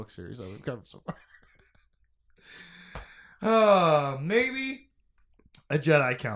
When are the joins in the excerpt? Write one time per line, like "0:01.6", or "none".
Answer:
none